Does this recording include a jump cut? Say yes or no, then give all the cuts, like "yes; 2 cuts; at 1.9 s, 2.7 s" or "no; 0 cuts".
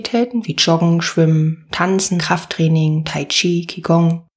yes; 1 cut; at 2.2 s